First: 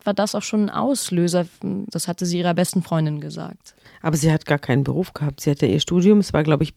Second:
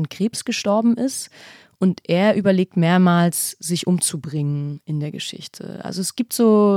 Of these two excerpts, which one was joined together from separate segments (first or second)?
first